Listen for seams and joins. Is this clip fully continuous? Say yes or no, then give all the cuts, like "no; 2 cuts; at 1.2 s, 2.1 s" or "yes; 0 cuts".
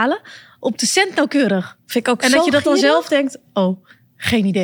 yes; 0 cuts